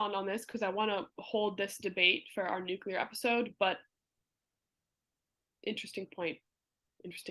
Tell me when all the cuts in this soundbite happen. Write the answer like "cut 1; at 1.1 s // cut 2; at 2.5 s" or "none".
none